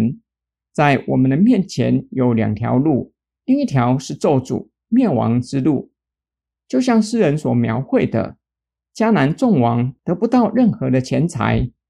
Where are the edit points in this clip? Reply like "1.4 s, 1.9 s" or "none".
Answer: 3.4 s, 6.5 s